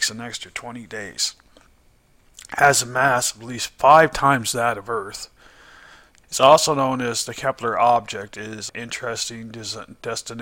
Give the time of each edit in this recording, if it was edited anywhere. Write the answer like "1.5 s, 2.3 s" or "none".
6.2 s, 8.7 s